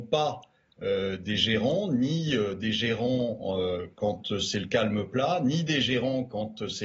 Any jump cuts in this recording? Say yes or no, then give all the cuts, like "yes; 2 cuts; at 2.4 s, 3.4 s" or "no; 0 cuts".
no; 0 cuts